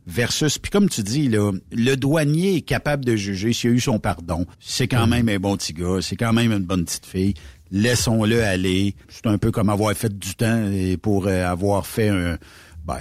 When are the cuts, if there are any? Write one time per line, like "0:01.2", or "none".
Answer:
0:04.5
0:09.0